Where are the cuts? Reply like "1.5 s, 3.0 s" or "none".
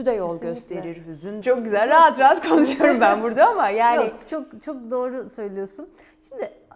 1.4 s

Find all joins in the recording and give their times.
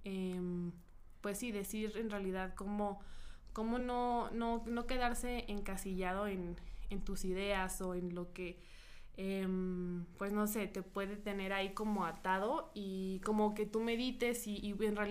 none

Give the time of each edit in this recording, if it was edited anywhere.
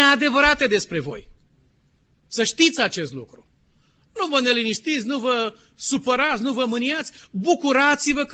none

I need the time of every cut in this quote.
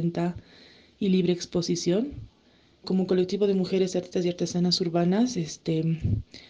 2.8 s

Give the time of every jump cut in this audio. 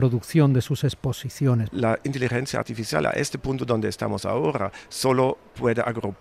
1.7 s

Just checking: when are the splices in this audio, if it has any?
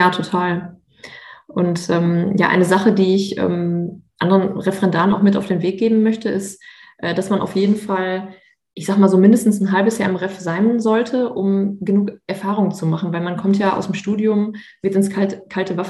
none

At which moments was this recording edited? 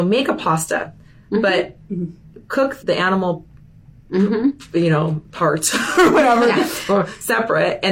2.8 s

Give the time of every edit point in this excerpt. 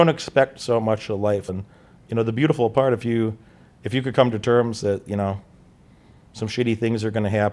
1.5 s

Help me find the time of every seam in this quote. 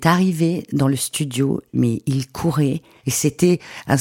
3.0 s

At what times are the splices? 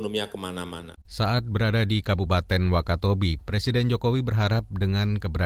1.0 s, 3.4 s

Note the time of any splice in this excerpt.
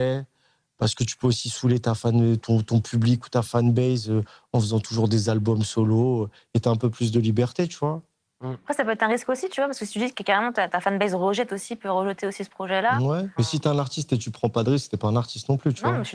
13.4 s

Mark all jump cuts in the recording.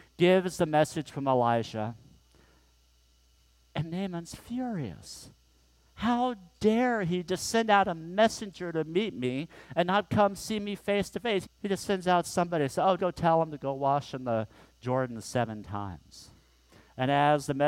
11.4 s, 13.0 s

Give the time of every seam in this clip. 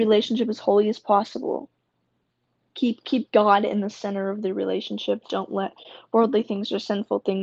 none

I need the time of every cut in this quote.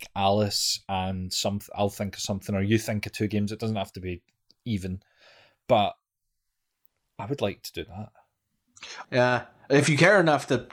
9.0 s

